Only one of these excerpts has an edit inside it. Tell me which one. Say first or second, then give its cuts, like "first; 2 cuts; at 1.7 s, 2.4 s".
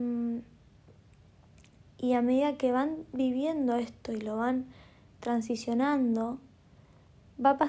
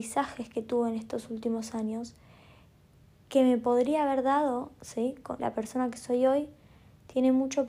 second; 1 cut; at 5.4 s